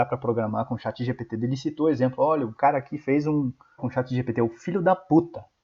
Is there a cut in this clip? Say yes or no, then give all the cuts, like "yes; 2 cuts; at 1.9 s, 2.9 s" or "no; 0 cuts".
yes; 1 cut; at 3.8 s